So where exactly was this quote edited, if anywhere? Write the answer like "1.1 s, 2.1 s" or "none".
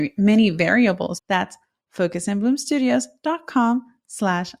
1.2 s